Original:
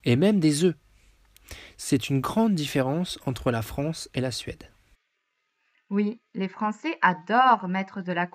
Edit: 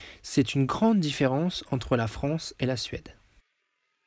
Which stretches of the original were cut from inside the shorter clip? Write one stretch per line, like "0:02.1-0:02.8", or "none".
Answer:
none